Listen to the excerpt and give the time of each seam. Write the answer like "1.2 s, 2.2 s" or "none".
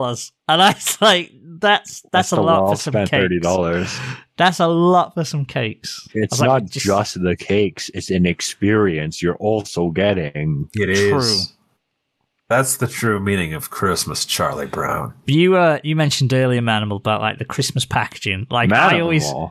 6.1 s